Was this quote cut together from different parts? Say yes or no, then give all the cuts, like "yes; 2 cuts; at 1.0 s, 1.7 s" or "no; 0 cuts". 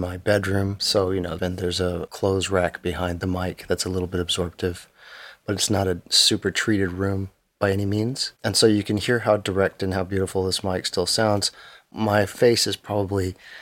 yes; 2 cuts; at 1.4 s, 8.4 s